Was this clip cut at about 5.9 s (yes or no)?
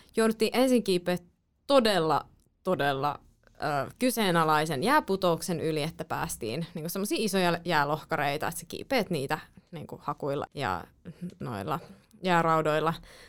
no